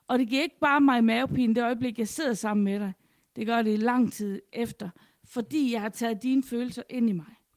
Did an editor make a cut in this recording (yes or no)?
no